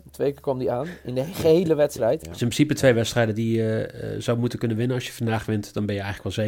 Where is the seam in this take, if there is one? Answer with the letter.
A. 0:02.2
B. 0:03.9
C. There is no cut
A